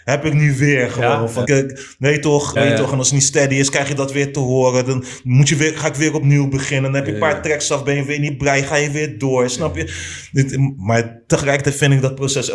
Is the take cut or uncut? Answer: cut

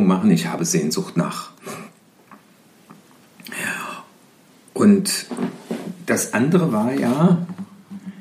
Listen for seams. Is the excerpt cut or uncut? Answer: uncut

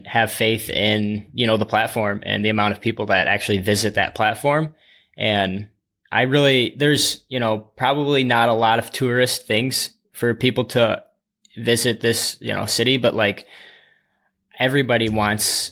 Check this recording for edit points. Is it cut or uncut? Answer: uncut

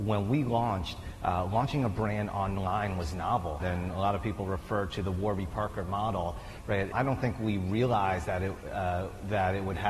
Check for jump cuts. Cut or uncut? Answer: cut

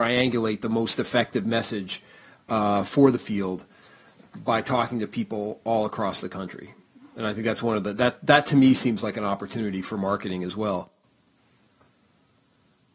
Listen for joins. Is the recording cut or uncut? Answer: uncut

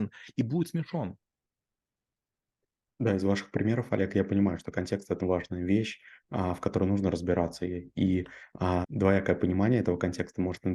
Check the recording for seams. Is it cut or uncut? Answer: cut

